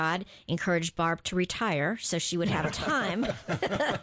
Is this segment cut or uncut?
uncut